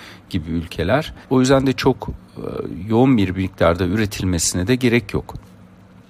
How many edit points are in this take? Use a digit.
1